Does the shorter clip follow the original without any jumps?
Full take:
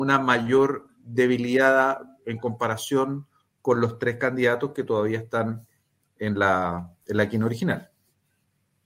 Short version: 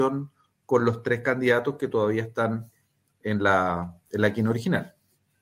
yes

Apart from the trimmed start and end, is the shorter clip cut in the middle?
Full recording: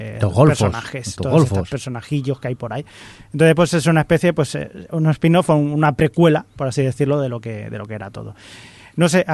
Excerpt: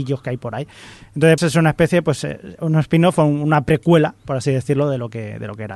yes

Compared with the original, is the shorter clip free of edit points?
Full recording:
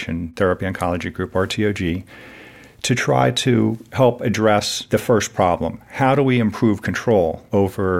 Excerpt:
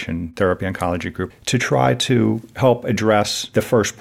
no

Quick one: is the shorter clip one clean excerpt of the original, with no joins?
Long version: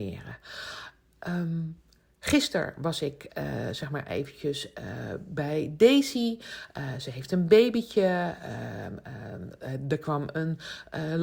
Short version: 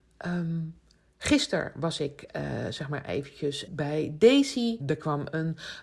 no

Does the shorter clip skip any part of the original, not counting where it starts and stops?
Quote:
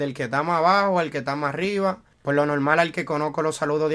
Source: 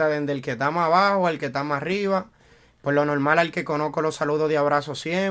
yes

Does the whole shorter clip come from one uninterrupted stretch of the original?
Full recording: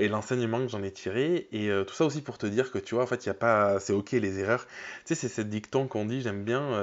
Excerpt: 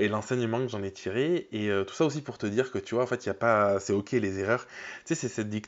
yes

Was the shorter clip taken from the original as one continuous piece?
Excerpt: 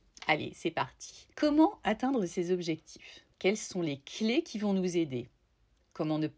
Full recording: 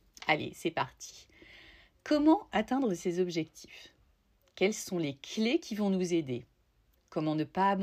no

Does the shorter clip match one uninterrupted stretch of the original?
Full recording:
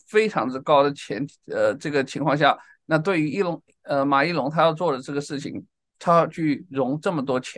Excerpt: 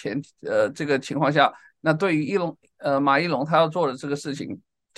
yes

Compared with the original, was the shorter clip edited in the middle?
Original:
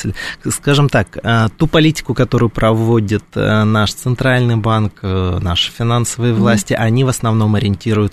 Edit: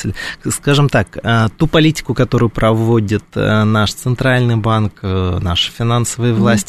no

